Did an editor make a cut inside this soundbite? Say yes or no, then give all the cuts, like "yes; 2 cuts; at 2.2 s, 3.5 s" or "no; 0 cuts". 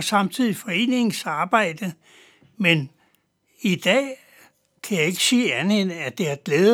no; 0 cuts